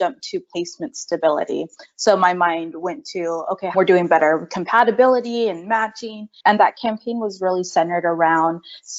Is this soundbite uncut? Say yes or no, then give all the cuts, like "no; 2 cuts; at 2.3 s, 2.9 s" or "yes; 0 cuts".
no; 2 cuts; at 3.7 s, 6.4 s